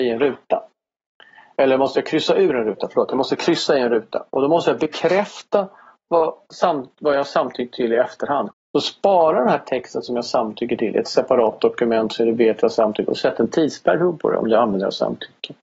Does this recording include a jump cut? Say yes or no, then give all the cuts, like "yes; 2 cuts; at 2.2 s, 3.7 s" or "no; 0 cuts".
yes; 1 cut; at 8.5 s